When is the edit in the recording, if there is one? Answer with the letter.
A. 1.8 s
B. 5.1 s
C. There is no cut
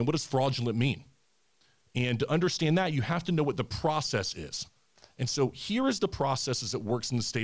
C